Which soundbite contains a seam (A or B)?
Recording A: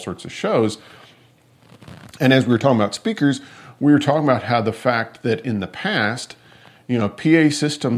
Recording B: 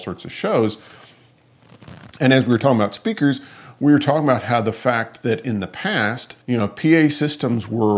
B